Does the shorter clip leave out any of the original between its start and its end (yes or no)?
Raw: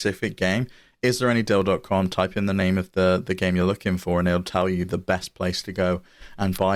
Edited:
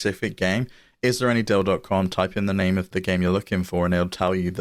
yes